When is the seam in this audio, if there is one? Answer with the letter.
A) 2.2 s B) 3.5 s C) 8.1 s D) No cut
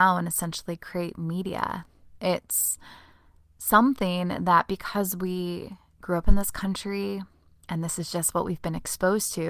D